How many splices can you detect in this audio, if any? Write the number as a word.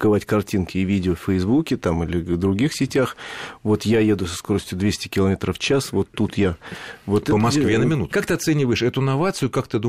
one